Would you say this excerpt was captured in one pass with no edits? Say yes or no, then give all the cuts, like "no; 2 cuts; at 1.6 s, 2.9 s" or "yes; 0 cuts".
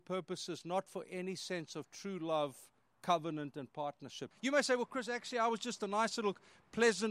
no; 1 cut; at 4.3 s